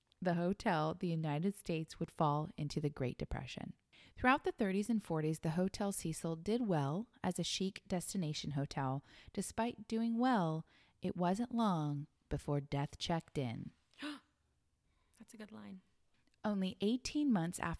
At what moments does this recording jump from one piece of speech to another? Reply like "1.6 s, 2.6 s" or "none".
none